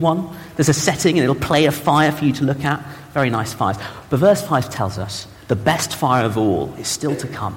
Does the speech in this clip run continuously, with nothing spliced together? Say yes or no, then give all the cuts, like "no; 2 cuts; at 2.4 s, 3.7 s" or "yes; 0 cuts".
yes; 0 cuts